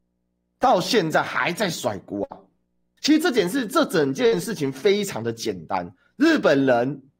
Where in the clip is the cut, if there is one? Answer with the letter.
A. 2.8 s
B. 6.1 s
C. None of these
C